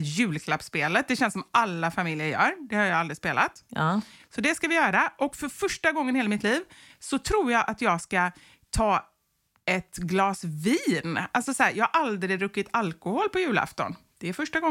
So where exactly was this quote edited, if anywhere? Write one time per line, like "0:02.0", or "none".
none